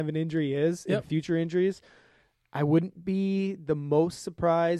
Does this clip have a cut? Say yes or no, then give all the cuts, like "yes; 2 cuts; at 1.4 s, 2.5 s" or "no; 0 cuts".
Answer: no; 0 cuts